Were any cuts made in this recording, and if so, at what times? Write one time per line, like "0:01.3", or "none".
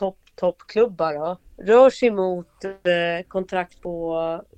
0:01.5